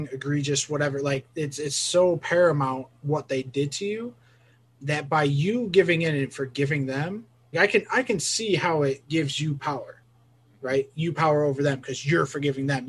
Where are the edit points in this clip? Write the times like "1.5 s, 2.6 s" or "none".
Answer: 7.5 s